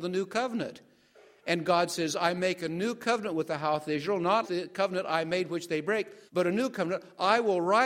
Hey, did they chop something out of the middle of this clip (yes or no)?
yes